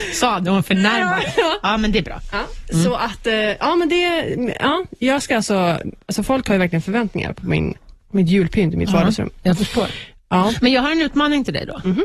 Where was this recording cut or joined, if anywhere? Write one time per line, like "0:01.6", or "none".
none